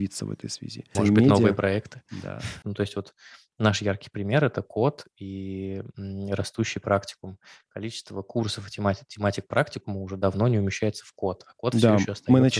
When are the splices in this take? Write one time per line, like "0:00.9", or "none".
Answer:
0:00.9
0:02.6